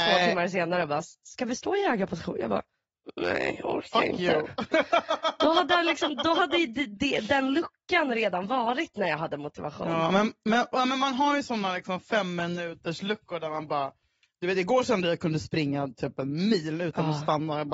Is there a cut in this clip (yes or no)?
no